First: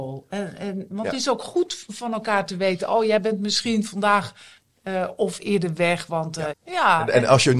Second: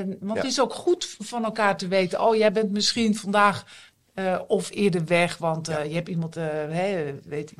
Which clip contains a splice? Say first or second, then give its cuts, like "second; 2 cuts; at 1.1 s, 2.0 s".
first; 1 cut; at 6.5 s